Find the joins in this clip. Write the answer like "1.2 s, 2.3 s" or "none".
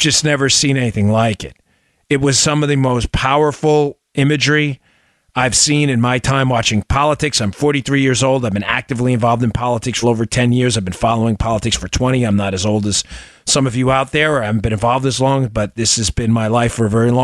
10.0 s